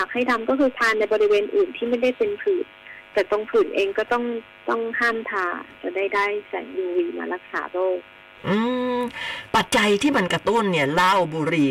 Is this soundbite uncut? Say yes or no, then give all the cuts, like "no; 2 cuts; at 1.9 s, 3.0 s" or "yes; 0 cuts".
no; 1 cut; at 9.7 s